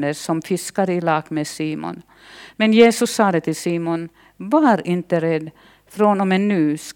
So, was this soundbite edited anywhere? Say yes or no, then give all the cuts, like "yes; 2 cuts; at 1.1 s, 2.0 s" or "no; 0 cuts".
no; 0 cuts